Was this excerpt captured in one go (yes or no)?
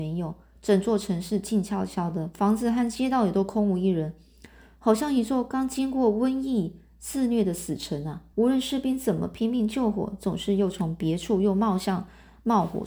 no